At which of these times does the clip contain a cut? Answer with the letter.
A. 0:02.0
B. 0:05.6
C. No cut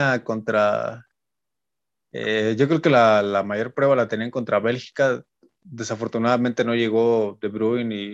C